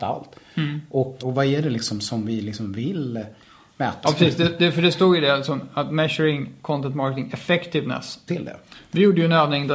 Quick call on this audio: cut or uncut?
cut